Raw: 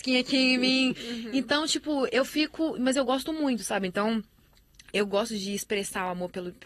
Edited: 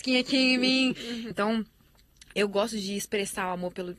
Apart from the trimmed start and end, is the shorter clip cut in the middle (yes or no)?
yes